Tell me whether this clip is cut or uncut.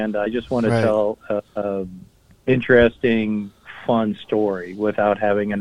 cut